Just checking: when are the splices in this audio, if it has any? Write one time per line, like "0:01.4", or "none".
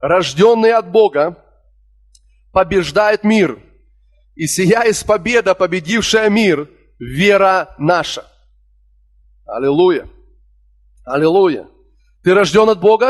none